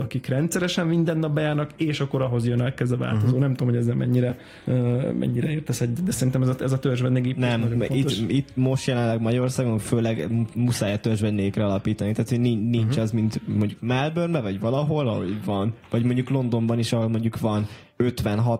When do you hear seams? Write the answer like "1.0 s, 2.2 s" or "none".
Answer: none